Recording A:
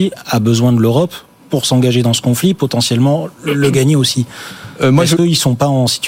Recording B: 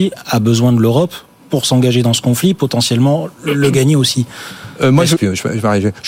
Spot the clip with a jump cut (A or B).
B